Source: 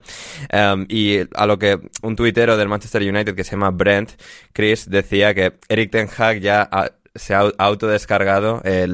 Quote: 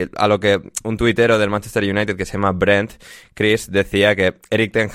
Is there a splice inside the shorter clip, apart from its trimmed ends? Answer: no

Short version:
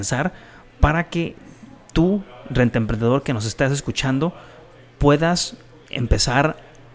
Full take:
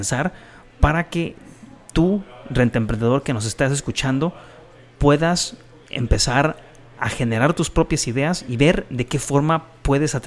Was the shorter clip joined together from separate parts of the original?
no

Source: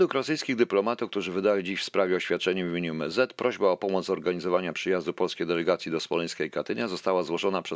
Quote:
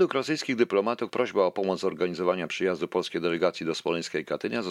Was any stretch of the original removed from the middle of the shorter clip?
yes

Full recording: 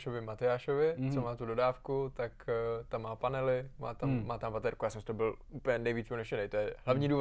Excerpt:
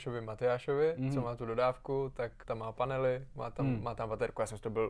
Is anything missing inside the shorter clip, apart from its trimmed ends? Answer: yes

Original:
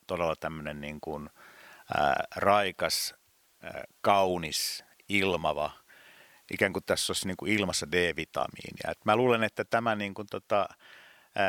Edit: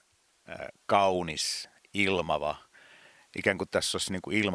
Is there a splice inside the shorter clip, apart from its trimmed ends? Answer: no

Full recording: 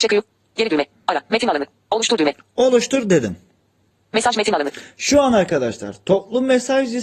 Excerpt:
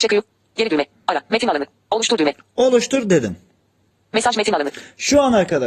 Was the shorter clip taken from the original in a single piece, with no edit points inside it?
yes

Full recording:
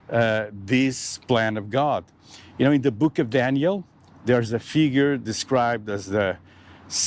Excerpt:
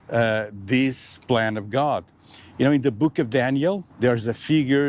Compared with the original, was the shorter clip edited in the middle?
yes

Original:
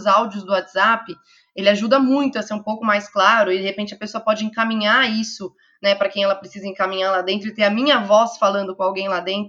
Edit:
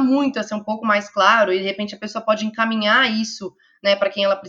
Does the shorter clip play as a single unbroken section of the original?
yes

